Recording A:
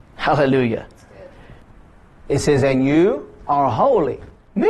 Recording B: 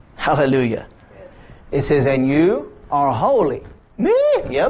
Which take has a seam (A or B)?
B